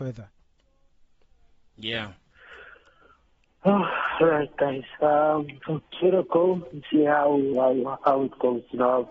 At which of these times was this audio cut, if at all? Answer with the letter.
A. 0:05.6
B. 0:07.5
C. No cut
B